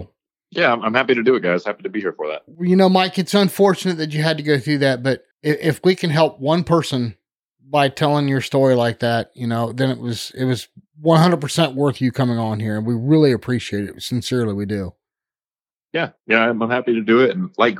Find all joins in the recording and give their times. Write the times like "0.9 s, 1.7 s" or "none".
5.3 s